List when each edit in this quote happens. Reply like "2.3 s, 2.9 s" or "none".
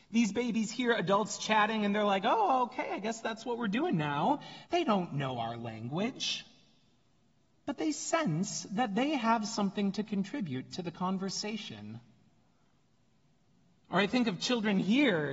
4.6 s